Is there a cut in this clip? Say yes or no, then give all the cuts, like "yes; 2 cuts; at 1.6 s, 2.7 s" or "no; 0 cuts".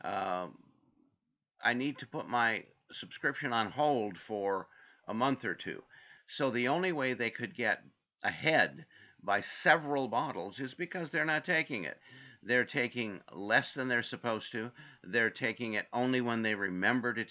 yes; 1 cut; at 6.2 s